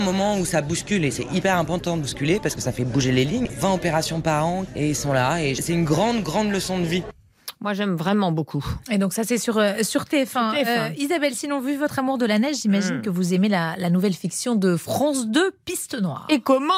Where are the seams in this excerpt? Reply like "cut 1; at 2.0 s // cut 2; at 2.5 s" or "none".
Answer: cut 1; at 3.5 s